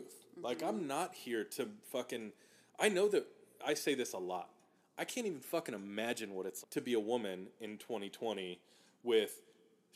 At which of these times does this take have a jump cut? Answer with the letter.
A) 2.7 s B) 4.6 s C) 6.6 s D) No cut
C